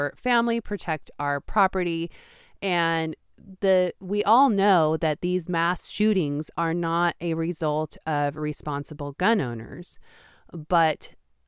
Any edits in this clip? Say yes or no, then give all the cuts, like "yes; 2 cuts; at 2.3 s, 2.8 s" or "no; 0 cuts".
no; 0 cuts